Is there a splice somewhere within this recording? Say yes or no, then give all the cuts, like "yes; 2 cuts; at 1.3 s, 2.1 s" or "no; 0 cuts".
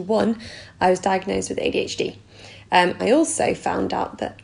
yes; 1 cut; at 3.0 s